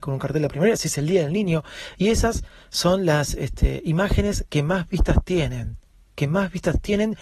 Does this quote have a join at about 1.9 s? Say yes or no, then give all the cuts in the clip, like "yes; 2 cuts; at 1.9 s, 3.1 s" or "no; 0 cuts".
no; 0 cuts